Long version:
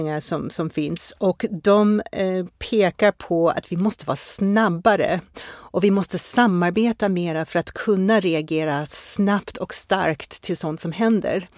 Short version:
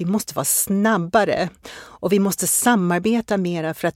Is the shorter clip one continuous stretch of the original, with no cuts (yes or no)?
yes